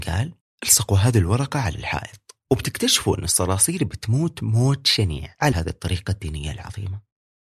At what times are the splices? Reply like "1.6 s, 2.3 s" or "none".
5.5 s